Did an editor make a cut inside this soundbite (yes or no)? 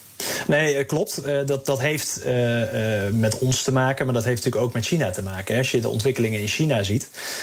no